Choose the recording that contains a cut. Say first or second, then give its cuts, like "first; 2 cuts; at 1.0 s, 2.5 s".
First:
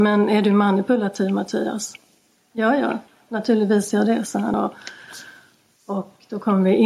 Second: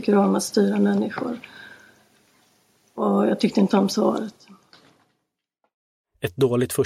first; 1 cut; at 4.5 s